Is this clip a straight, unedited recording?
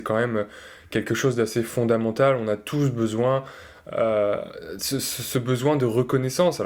yes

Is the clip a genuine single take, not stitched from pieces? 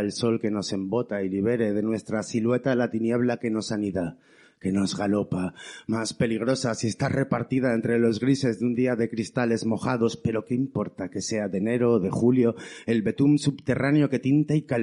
yes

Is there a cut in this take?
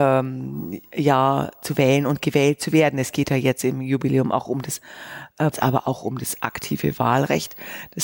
yes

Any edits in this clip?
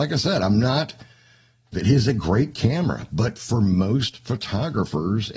yes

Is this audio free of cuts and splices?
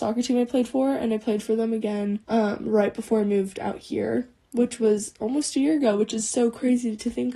no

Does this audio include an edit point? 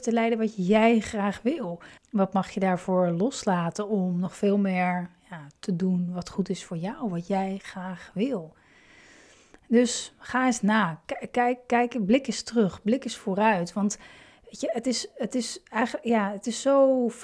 yes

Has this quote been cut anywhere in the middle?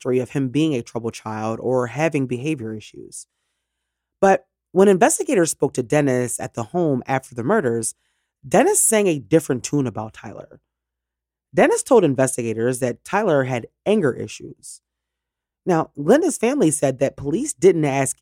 no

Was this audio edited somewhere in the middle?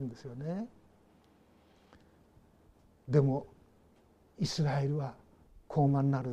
no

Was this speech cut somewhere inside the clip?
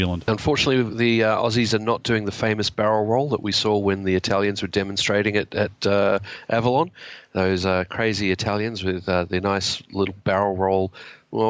no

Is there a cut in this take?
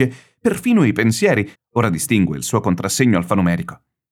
yes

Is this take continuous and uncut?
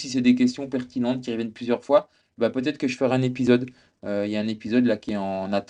yes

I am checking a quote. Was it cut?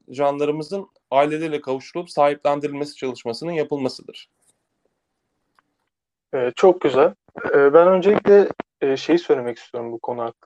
no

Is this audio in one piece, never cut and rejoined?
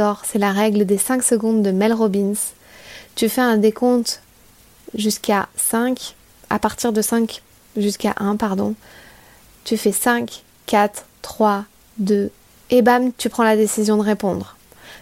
no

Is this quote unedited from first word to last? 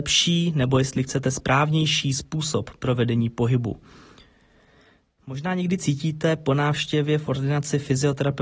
yes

